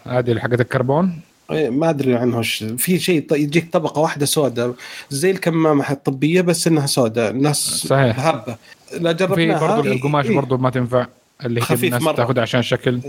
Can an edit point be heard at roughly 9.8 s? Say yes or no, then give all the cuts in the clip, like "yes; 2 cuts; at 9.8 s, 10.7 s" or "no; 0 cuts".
yes; 1 cut; at 9.8 s